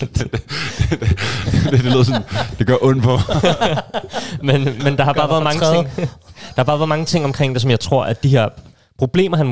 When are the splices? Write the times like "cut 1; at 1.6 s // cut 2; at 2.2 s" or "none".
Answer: cut 1; at 4.8 s